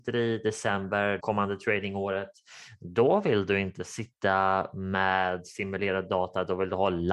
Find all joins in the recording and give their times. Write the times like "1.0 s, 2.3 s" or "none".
1.2 s